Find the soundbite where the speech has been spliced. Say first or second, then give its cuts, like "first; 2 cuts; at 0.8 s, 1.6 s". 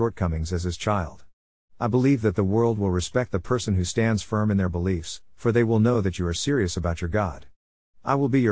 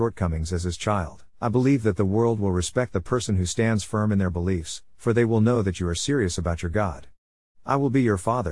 second; 1 cut; at 1.3 s